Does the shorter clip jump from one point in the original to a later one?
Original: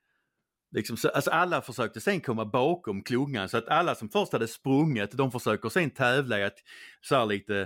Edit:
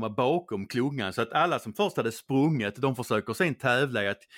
no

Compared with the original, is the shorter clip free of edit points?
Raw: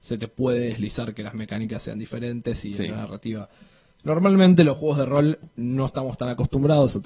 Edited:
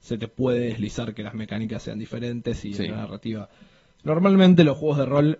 yes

